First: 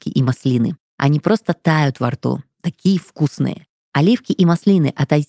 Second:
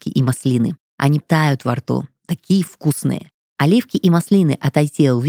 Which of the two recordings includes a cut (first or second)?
second